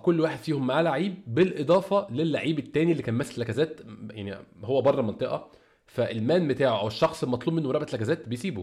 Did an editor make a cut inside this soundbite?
yes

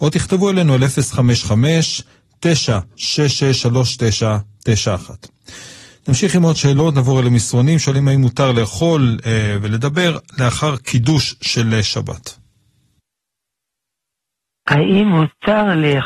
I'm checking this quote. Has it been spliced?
no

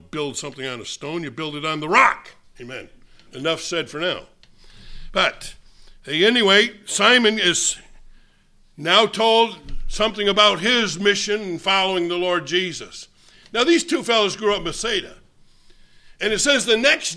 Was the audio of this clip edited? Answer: no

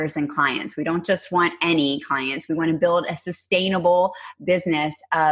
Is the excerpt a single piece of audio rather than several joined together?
yes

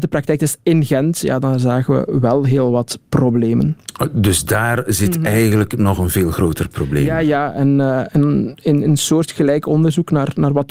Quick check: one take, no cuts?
yes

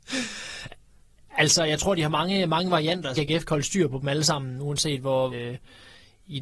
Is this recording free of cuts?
no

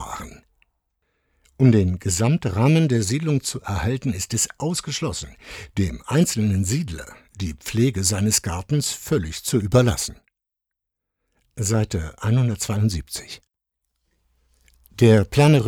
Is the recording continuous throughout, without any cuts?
yes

